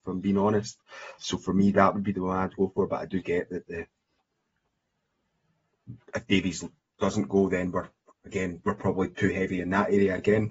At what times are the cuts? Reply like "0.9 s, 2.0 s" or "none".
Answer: 1.2 s